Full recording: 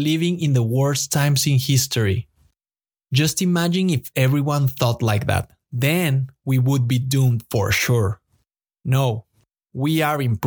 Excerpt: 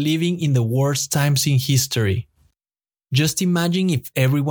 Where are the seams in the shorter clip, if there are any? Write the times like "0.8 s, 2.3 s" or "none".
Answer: none